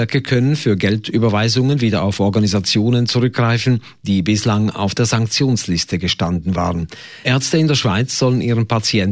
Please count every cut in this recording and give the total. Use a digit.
1